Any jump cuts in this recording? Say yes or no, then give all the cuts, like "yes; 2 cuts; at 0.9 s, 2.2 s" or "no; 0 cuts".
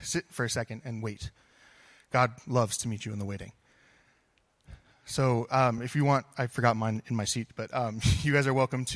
no; 0 cuts